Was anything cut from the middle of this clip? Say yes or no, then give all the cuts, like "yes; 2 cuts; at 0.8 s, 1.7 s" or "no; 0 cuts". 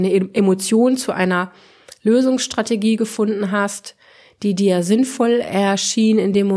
no; 0 cuts